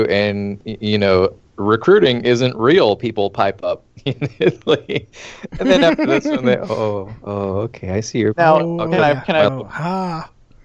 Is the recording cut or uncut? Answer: uncut